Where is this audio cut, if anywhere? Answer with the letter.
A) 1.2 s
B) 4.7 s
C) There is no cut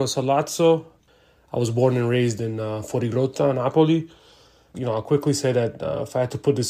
B